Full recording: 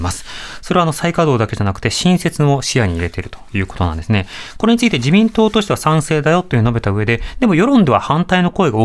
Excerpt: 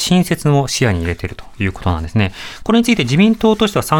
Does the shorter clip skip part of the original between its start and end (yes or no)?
no